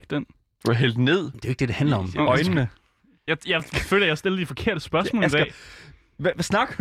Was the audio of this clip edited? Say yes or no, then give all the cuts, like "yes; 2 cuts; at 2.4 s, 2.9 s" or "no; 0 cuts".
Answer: no; 0 cuts